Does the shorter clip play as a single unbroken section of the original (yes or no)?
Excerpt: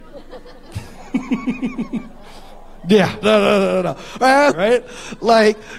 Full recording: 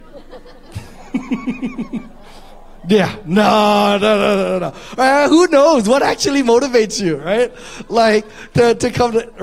no